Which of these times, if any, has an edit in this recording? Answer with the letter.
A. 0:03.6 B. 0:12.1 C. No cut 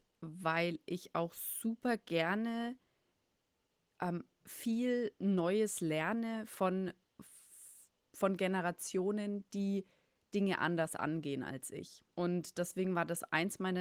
B